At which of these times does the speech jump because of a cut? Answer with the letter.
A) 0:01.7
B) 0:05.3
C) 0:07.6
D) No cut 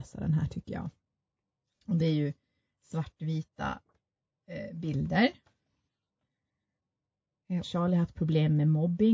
C